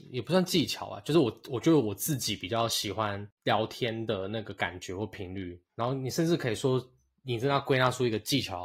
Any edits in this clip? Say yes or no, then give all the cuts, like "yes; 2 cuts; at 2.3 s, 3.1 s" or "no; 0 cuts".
no; 0 cuts